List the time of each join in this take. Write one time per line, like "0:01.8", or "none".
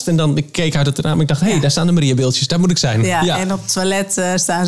none